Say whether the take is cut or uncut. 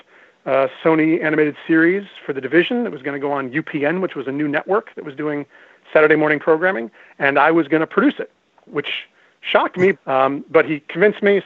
cut